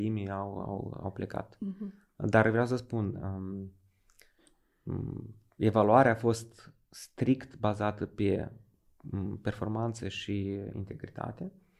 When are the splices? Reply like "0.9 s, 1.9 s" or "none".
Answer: 1.0 s